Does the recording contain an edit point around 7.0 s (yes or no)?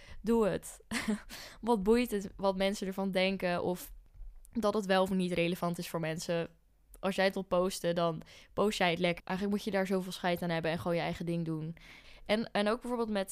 no